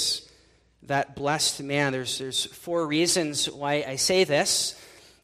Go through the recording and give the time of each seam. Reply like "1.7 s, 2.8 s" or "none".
none